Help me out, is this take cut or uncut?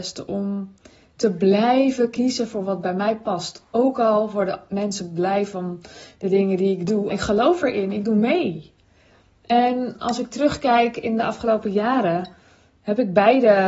cut